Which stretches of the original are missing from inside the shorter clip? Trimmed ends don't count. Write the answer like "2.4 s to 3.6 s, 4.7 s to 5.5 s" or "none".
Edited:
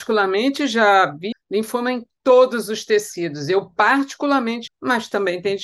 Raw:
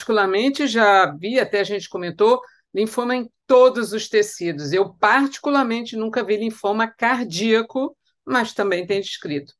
1.3 s to 2.6 s, 5.9 s to 8.1 s

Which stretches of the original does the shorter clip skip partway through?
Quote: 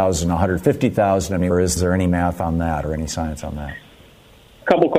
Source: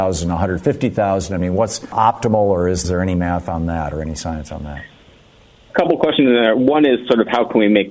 1.5 s to 2.6 s

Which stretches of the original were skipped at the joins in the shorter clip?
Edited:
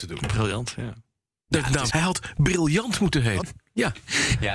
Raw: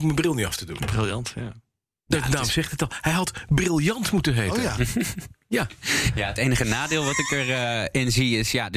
2.5 s to 3.0 s, 4.5 s to 5.2 s

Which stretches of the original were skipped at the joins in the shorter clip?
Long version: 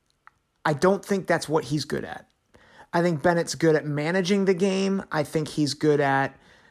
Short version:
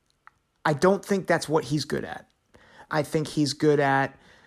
2.9 s to 5.1 s

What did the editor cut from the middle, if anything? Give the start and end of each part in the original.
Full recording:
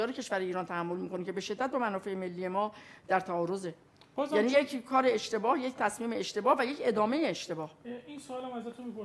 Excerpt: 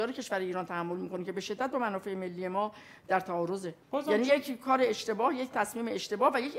3.8 s to 4.1 s

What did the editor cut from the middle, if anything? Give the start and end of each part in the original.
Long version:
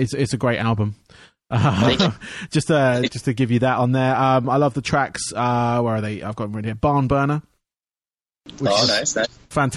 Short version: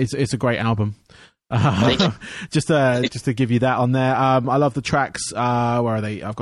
none

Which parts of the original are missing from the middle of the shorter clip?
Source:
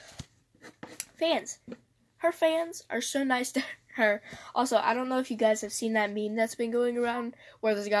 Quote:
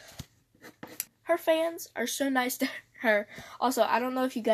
1.1 s to 2.0 s

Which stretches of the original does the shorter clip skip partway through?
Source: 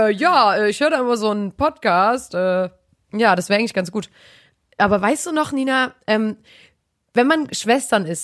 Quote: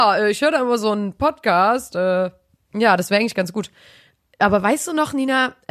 none

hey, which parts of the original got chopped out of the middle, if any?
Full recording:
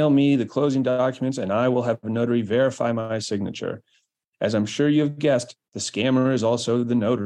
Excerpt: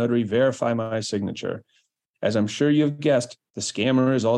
none

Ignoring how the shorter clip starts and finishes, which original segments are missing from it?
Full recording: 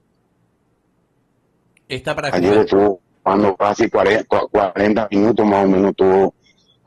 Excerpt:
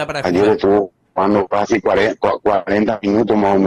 none

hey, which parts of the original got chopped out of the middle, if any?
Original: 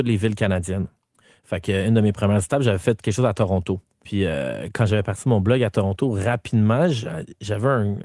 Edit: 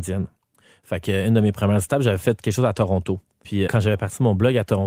4.3 s to 4.7 s

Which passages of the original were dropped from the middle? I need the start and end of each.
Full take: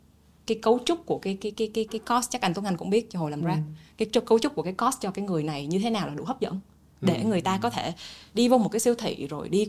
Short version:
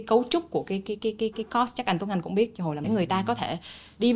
3.4 s to 7.2 s

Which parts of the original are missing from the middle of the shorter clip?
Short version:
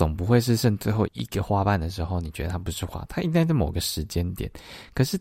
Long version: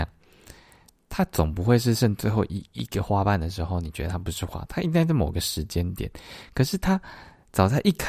2.5 s to 2.7 s

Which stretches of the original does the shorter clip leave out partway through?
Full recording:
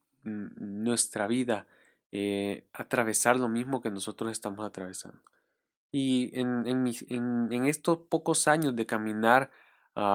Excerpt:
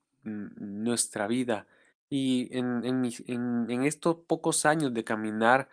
1.9 s to 5.7 s

